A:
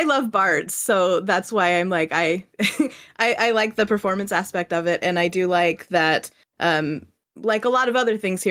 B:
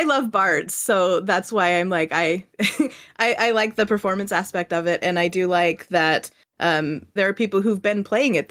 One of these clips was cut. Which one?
B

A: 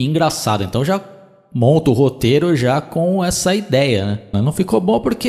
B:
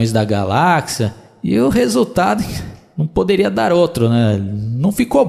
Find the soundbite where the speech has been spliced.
A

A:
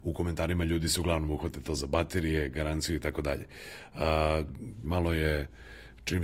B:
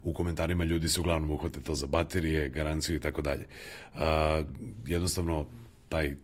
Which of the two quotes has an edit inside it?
A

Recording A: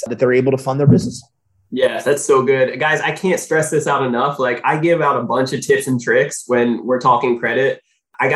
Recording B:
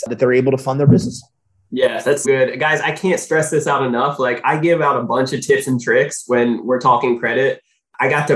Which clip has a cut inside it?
B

